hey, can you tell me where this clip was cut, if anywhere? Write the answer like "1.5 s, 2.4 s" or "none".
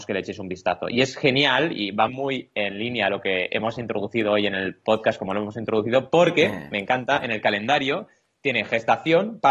2.1 s